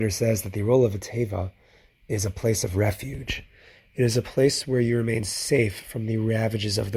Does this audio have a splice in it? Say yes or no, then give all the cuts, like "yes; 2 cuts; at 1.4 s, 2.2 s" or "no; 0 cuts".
no; 0 cuts